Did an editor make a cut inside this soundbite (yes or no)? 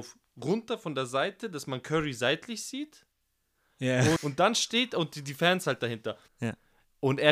yes